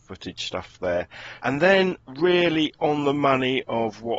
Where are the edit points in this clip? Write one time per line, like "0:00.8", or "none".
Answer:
0:01.4